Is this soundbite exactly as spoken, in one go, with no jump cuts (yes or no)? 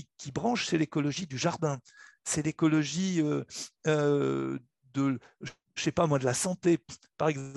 yes